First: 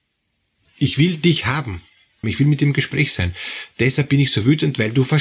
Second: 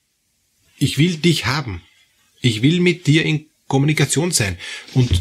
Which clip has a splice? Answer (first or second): first